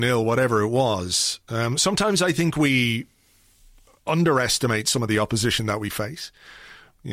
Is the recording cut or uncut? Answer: uncut